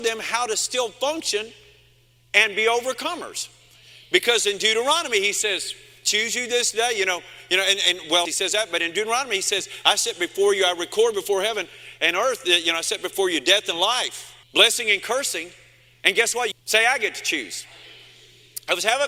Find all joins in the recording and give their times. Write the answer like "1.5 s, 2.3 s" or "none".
8.3 s, 14.4 s, 16.5 s